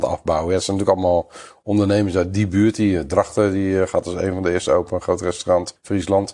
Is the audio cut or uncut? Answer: uncut